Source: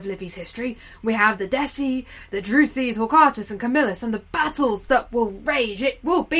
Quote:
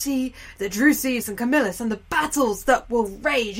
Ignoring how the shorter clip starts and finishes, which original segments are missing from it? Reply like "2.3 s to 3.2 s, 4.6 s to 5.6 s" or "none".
2.9 s to 3.4 s